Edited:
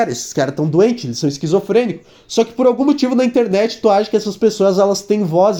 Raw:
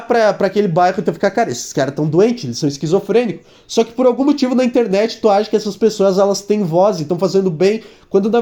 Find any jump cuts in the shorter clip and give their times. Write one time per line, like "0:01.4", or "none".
none